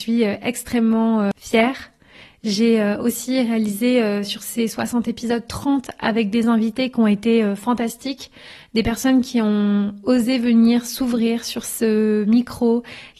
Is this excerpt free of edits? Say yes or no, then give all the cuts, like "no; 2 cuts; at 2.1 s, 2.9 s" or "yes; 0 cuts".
yes; 0 cuts